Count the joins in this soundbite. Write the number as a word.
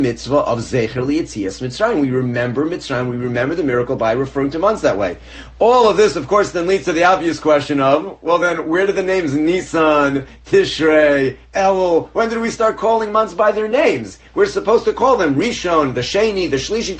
zero